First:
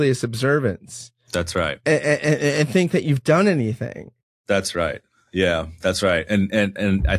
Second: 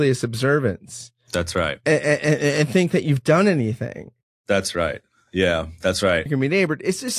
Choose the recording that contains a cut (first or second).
second